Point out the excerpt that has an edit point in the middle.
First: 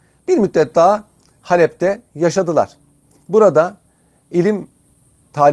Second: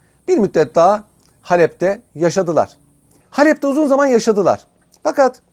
second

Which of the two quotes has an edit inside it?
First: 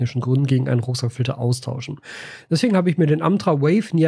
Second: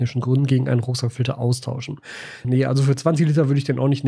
second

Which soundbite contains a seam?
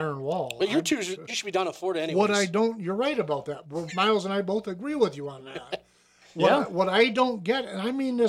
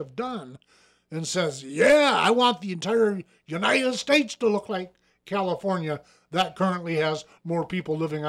first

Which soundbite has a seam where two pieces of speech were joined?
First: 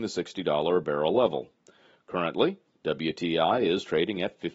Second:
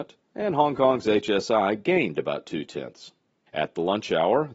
second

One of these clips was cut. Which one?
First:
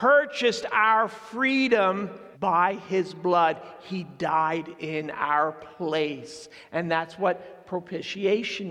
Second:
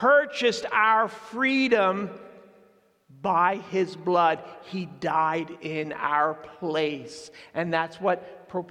first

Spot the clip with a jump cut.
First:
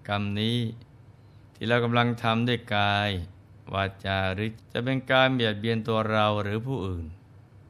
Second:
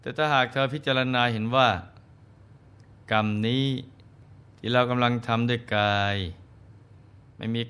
first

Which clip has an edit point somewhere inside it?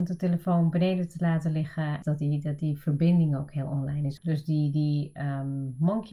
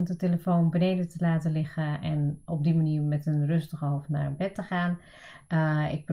first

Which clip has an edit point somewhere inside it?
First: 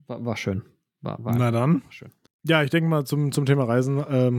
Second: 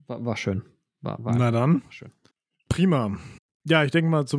first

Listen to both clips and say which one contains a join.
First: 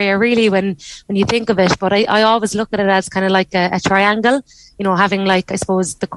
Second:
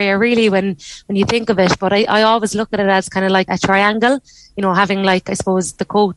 second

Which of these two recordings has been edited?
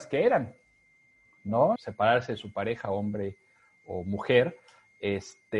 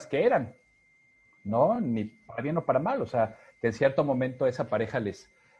first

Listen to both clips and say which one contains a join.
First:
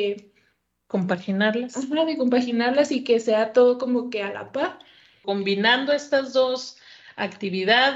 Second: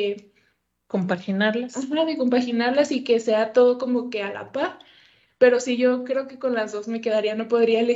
first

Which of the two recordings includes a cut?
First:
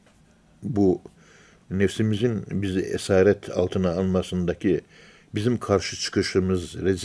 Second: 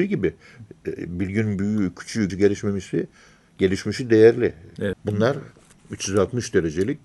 second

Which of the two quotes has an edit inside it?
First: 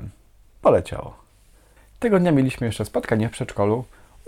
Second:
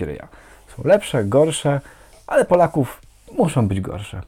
first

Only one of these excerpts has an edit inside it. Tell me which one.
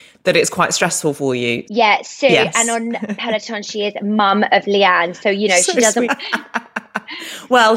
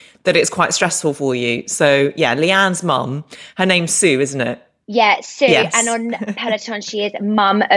first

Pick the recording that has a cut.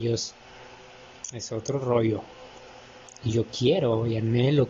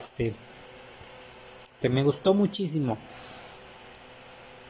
second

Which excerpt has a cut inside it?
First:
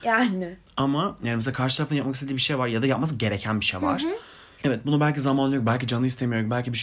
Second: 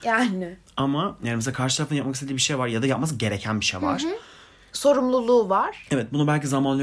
first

